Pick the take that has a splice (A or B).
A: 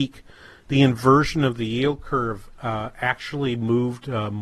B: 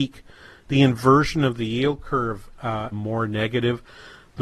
B